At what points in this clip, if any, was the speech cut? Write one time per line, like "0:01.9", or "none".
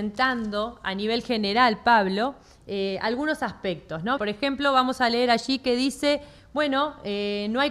0:04.2